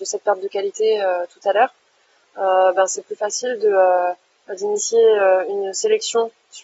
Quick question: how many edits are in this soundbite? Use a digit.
0